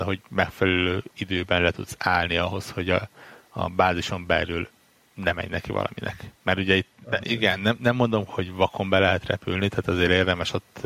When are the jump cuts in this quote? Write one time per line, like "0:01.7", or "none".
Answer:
0:07.2
0:08.3

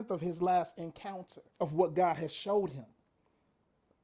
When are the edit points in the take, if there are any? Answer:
0:01.5

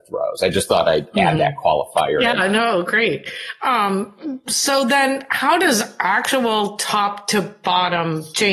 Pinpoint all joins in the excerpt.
none

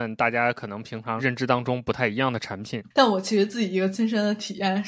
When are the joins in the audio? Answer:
0:02.9

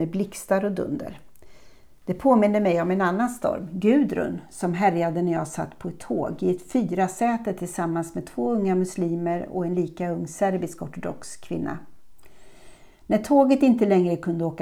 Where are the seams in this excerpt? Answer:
none

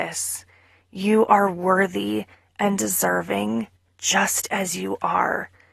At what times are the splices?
none

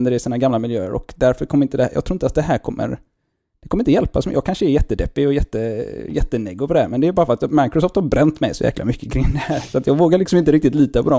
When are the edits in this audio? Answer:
none

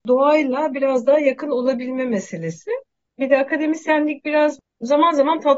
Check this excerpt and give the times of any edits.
0:03.2

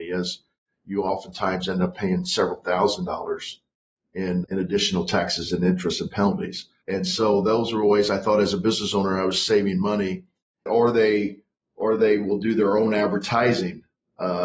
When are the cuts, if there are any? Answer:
0:04.4
0:06.8
0:10.7

